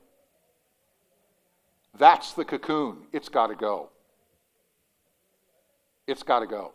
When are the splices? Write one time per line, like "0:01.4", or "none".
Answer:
none